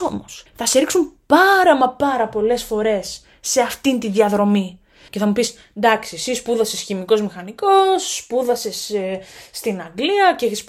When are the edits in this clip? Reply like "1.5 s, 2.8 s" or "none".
5.1 s